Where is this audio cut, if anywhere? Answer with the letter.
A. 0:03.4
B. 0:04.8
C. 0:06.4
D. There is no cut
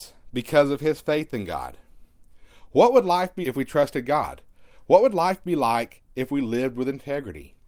A